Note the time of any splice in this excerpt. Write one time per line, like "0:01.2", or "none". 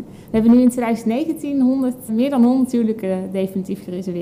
0:02.1